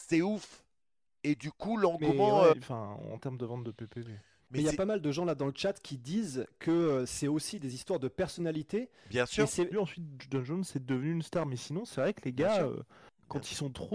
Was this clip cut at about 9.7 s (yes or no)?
yes